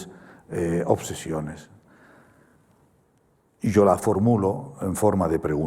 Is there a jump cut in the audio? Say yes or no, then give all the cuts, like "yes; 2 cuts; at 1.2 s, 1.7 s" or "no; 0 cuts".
no; 0 cuts